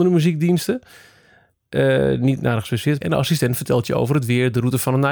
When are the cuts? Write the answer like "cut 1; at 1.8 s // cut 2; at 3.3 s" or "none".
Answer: cut 1; at 3.0 s